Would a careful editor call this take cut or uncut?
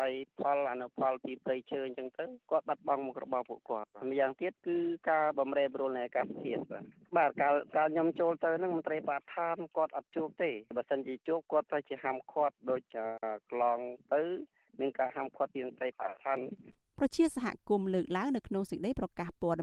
uncut